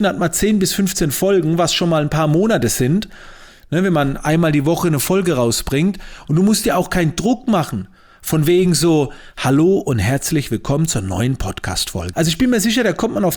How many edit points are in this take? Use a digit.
2